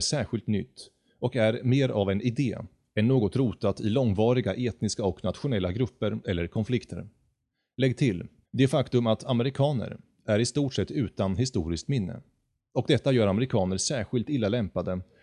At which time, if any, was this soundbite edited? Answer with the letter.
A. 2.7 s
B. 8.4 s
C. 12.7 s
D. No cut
B